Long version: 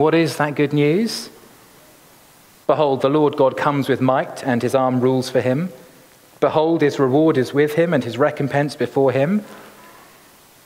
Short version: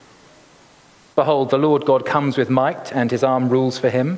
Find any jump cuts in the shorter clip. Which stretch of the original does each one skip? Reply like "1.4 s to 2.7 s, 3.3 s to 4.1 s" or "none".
none